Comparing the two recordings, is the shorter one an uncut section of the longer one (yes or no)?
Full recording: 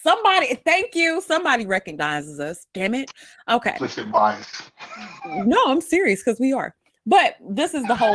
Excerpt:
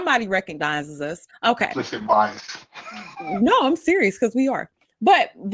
no